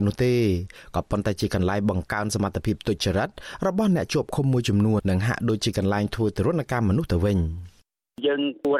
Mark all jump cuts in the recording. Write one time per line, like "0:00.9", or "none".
0:05.0